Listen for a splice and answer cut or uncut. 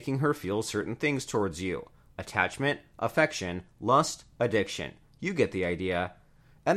uncut